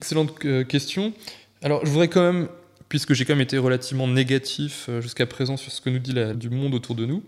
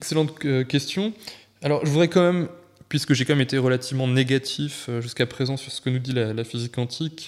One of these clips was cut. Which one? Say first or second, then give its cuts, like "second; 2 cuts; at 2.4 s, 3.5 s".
first; 1 cut; at 6.3 s